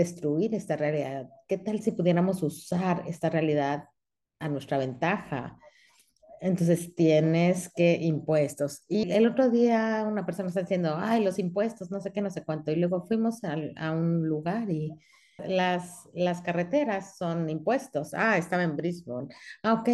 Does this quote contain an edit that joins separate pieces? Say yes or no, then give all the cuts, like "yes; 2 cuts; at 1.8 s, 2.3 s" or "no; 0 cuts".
yes; 2 cuts; at 9.0 s, 15.4 s